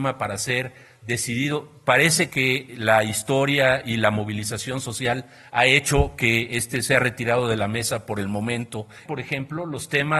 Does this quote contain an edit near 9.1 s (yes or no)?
yes